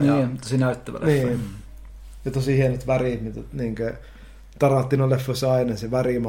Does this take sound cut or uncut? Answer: uncut